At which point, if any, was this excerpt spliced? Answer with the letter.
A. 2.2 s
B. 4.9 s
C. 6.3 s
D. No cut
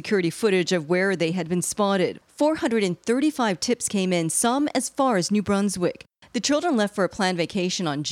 D